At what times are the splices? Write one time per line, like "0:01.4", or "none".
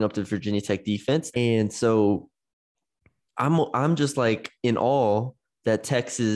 0:01.3